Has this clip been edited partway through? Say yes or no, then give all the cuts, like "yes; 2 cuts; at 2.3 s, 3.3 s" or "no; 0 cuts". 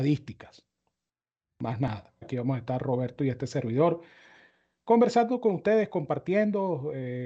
yes; 1 cut; at 2.2 s